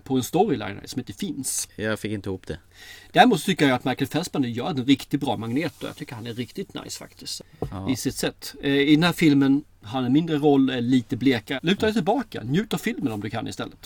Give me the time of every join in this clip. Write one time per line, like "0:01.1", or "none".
0:11.6